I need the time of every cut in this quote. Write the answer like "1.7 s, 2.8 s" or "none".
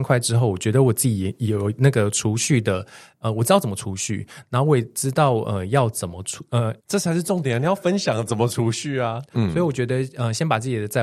6.8 s, 9.3 s

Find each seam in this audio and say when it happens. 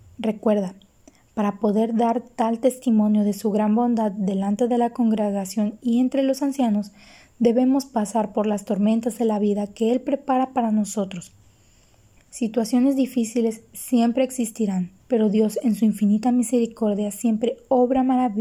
12.2 s, 15.0 s

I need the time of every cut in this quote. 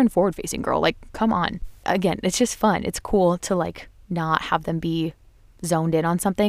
1.8 s

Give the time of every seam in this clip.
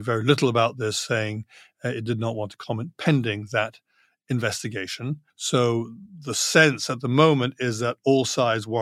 none

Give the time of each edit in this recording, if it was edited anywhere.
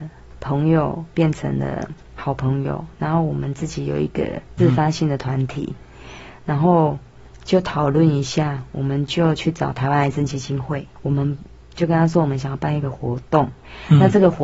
4.6 s

